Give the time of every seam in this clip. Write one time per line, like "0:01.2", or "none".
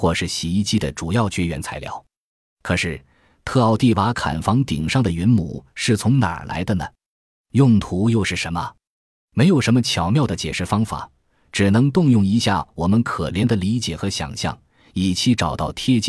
0:09.1